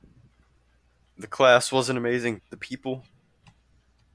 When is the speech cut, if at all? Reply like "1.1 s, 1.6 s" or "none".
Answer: 1.0 s, 2.4 s